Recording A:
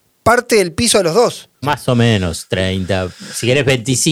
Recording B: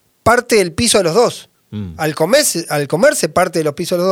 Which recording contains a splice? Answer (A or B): A